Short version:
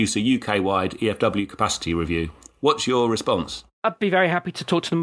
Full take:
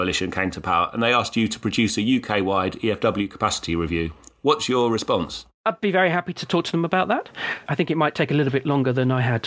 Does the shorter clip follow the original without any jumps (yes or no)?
yes